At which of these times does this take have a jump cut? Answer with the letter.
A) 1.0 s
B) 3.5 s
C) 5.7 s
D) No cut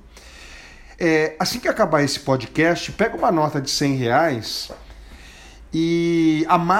A